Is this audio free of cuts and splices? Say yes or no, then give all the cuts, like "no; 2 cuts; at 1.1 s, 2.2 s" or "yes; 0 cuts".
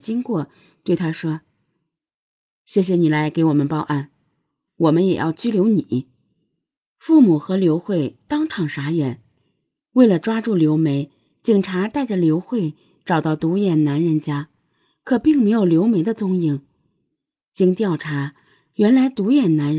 no; 1 cut; at 4.7 s